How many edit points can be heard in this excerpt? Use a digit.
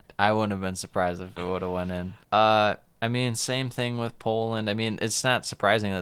1